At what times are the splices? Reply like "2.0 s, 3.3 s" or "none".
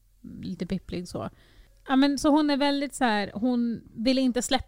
none